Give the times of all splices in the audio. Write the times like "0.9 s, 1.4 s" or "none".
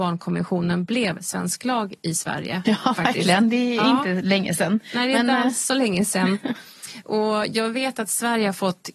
2.7 s